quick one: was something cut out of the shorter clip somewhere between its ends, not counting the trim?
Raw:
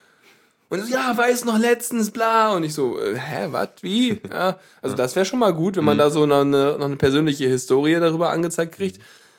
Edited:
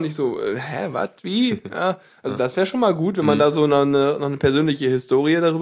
no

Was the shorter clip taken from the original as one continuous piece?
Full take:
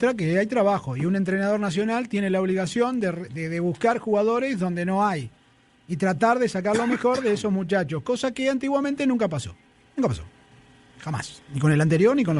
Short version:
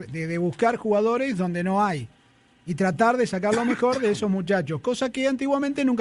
yes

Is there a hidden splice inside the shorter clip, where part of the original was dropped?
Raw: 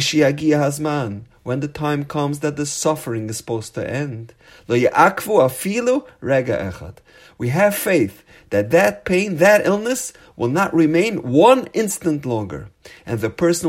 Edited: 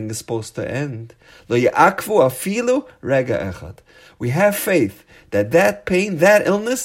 no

